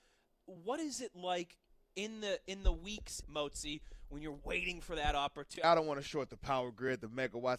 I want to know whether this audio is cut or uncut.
cut